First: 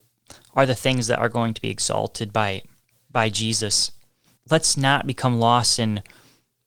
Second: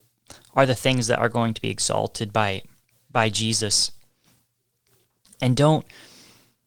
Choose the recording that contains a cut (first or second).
first